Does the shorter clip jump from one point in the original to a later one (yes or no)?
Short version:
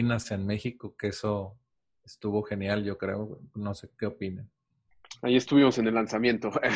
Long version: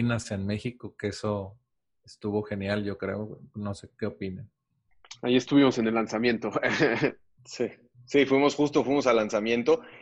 no